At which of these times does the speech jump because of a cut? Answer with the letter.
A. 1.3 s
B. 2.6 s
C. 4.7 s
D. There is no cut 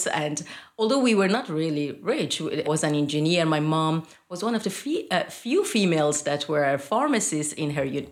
B